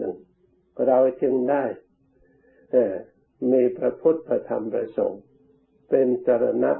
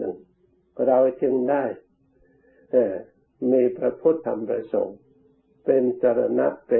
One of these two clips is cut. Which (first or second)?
second